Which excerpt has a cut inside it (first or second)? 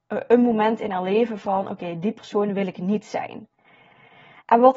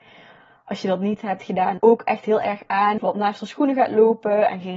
second